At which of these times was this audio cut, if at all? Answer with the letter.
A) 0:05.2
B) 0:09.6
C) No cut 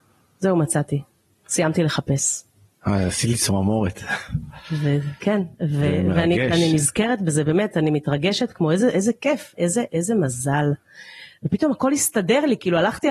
B